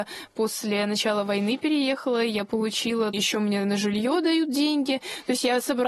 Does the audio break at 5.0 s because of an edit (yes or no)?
no